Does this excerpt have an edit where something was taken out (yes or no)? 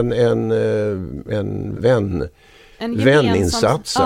yes